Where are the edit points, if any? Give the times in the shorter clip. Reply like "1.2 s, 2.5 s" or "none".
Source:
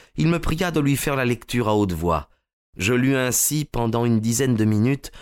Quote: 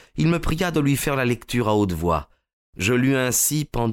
none